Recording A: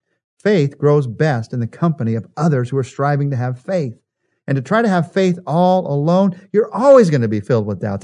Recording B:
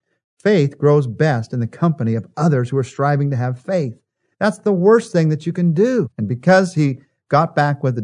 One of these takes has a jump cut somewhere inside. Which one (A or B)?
B